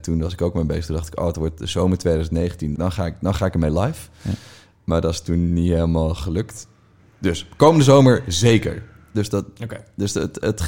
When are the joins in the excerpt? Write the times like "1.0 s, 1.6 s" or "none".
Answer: 2.7 s, 9.1 s